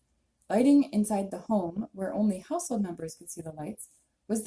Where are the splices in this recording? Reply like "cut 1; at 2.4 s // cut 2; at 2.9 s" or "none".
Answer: none